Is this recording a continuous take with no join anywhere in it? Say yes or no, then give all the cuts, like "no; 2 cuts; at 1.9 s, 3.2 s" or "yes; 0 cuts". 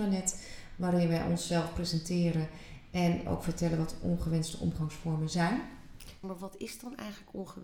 no; 1 cut; at 6.2 s